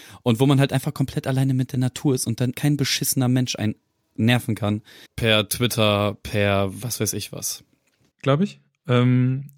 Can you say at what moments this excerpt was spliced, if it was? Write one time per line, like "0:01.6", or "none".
0:02.5
0:05.1
0:08.1